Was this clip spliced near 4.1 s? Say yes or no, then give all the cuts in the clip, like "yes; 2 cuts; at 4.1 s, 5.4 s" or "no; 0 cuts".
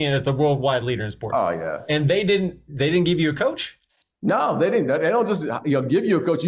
no; 0 cuts